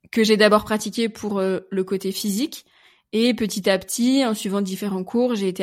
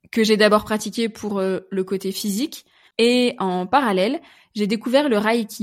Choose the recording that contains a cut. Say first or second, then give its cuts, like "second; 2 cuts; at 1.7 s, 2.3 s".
second; 1 cut; at 2.9 s